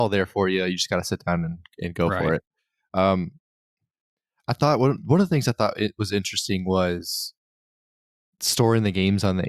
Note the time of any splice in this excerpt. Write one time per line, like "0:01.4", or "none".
none